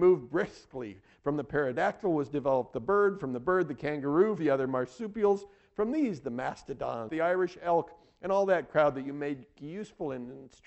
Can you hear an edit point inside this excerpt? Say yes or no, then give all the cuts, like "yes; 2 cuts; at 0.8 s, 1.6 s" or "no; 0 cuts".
yes; 2 cuts; at 4.4 s, 7.1 s